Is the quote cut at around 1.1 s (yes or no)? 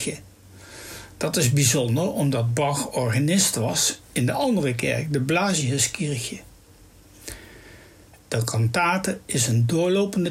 no